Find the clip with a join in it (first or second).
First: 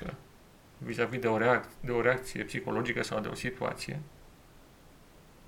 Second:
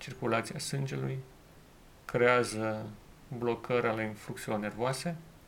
first